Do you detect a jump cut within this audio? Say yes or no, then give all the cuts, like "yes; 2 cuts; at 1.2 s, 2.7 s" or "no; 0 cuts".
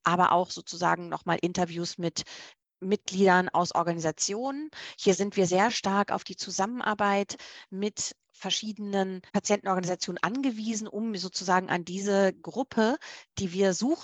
yes; 1 cut; at 9.3 s